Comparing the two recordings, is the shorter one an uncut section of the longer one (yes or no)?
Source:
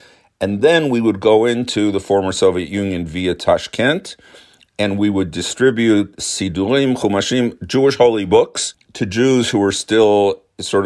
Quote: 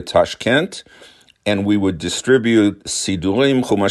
yes